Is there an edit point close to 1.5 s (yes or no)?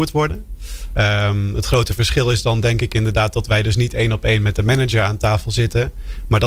no